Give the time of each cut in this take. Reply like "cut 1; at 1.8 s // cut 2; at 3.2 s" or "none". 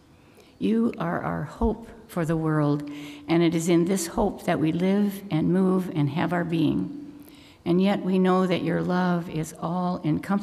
cut 1; at 7.5 s